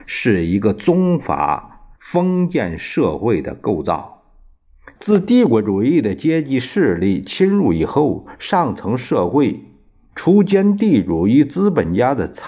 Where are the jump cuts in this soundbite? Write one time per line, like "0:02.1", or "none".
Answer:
0:02.0
0:05.0